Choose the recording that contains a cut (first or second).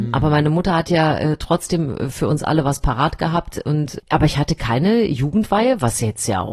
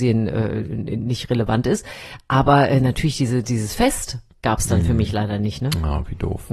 first